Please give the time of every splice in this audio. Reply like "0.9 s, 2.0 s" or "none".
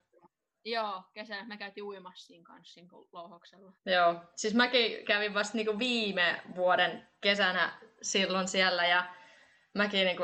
3.8 s